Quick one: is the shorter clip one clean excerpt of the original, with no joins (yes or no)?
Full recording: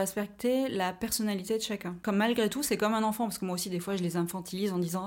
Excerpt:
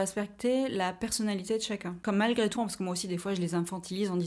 no